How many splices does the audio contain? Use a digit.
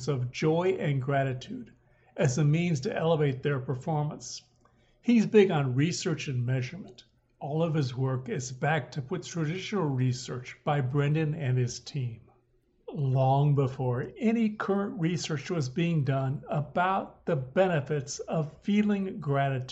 0